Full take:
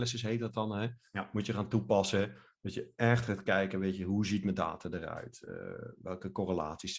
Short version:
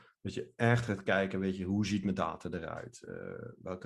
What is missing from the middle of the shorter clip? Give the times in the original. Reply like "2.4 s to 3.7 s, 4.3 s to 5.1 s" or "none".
none